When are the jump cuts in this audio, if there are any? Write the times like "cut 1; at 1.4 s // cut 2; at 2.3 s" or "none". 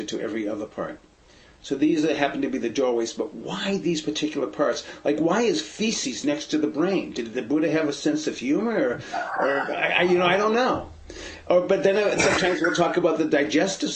none